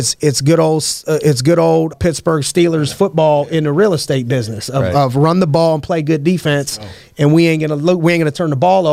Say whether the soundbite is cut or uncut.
cut